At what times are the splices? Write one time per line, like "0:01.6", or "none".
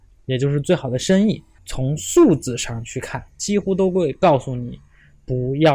0:01.6
0:03.3